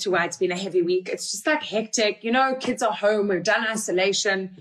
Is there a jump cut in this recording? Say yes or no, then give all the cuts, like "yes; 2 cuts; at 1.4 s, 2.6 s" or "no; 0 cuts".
no; 0 cuts